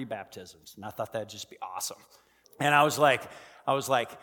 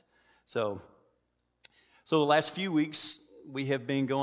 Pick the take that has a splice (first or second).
first